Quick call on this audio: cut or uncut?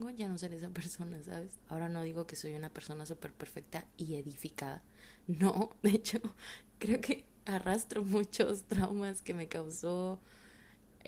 cut